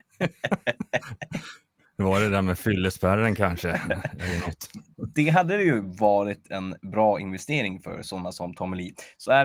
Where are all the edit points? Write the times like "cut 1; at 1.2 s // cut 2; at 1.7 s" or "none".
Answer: none

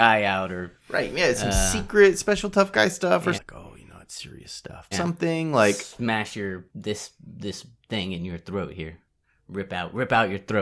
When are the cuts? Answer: cut 1; at 3.3 s // cut 2; at 4.9 s // cut 3; at 6.7 s

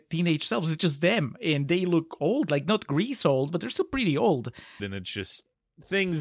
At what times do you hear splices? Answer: cut 1; at 4.8 s

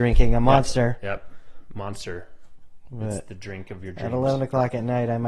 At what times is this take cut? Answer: none

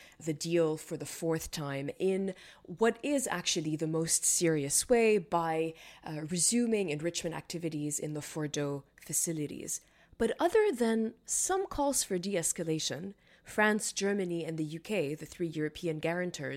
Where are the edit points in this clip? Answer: none

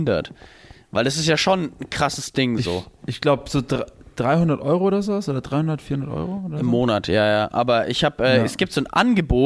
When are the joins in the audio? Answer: none

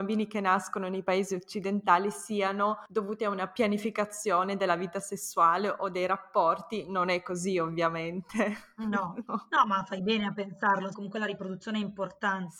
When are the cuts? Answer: cut 1; at 9.3 s // cut 2; at 10.9 s

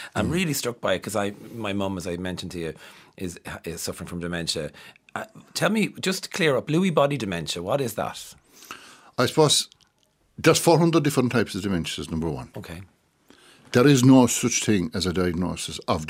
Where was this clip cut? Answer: none

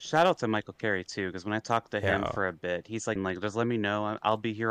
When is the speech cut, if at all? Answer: cut 1; at 3.2 s

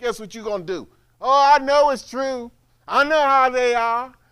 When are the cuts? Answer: none

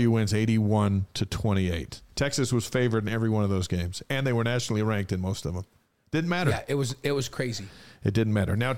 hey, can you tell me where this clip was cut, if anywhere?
cut 1; at 2.1 s

